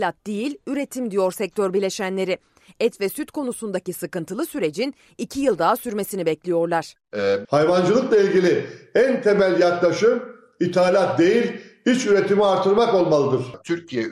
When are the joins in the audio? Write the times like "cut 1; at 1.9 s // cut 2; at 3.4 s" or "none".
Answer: cut 1; at 7.4 s